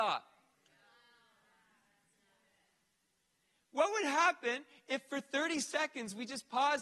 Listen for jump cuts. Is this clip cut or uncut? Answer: uncut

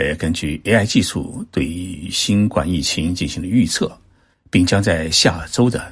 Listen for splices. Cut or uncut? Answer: cut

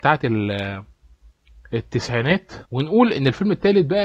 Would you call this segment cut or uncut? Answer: cut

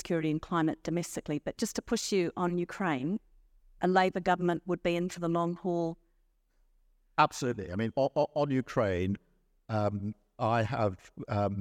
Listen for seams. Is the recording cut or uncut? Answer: uncut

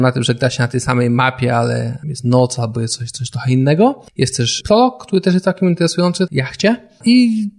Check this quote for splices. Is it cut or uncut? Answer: cut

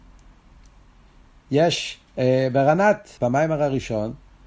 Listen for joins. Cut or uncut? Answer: cut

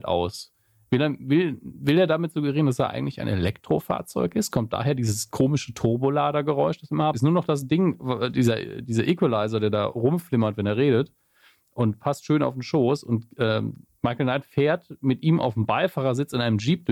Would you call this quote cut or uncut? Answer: cut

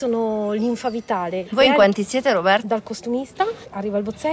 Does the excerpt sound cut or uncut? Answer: cut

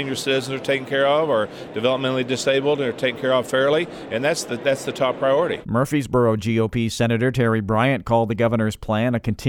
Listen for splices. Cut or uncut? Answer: uncut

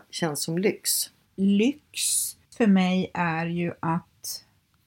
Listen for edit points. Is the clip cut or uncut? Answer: uncut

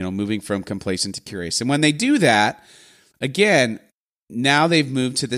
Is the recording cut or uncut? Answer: uncut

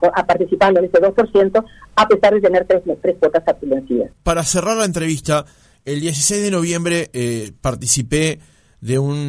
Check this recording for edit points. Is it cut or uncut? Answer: uncut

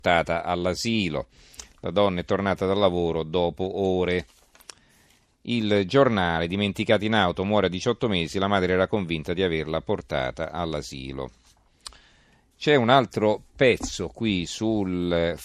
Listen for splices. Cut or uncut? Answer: uncut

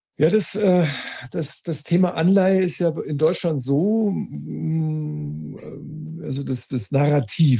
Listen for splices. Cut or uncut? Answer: uncut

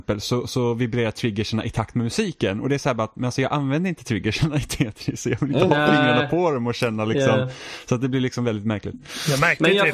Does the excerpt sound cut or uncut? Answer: uncut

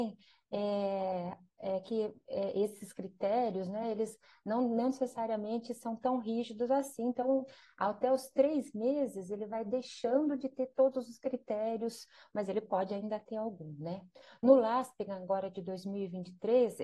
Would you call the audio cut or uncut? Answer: uncut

